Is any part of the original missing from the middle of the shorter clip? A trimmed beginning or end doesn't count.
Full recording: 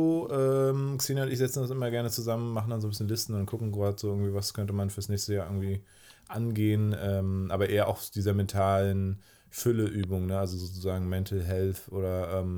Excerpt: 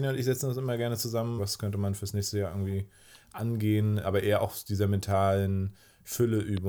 yes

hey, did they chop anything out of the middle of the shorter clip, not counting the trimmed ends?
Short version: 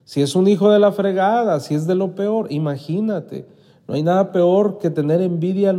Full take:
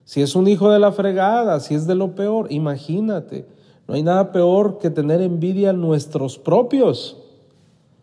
no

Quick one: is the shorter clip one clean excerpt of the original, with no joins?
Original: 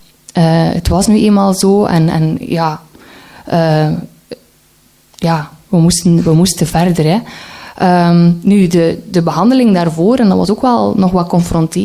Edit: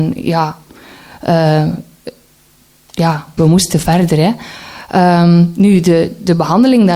no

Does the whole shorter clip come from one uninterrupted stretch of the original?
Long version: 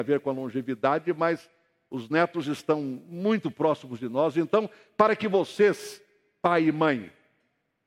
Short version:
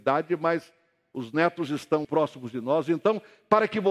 no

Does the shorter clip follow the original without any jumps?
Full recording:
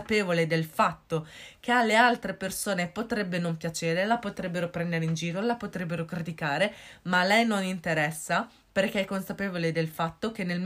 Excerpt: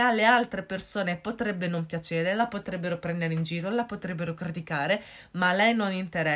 yes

